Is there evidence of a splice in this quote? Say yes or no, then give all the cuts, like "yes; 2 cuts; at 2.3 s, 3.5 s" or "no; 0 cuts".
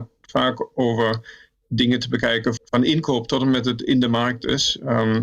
yes; 1 cut; at 2.6 s